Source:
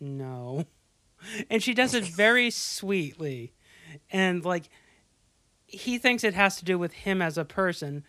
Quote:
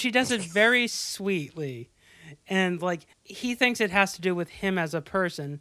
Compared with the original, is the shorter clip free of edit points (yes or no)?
no